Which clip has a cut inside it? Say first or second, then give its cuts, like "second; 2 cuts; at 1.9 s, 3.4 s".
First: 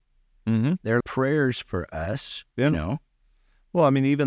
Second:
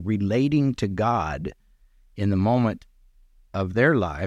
first; 1 cut; at 1.0 s